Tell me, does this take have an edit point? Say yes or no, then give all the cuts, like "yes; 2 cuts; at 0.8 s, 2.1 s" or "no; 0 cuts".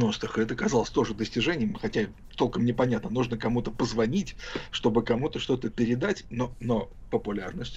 no; 0 cuts